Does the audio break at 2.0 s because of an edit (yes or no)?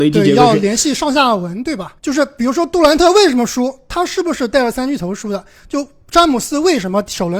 yes